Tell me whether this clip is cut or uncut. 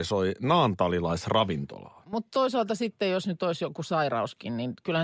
cut